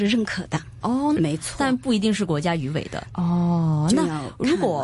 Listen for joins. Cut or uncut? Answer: cut